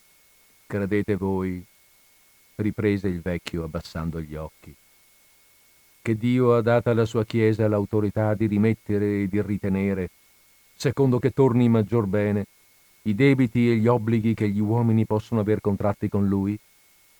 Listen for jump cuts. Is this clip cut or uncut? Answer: uncut